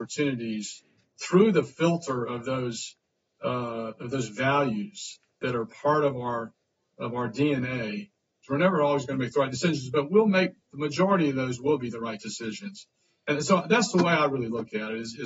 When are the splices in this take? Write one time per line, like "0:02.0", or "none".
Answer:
none